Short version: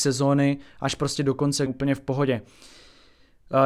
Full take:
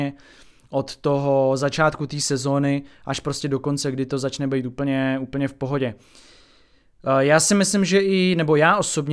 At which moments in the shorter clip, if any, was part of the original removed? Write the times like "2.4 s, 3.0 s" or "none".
1.7 s